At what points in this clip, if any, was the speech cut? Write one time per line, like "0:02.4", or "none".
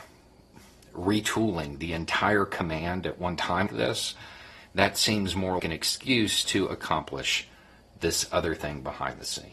0:03.7
0:05.6